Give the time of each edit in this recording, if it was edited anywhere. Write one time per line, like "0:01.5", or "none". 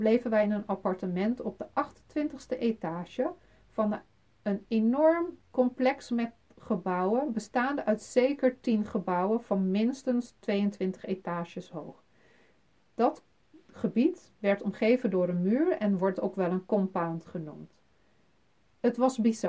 none